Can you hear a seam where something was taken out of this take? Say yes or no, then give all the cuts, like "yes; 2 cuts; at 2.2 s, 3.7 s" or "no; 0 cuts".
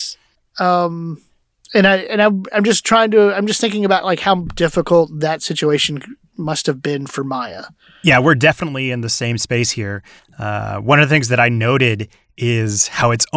no; 0 cuts